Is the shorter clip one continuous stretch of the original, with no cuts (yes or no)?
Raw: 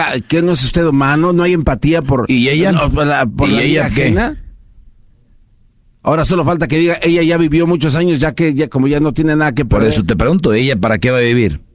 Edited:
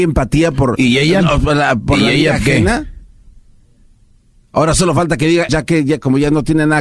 no